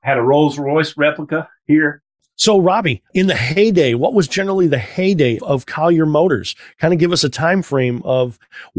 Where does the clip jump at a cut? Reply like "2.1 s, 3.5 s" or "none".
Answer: 3.1 s, 5.4 s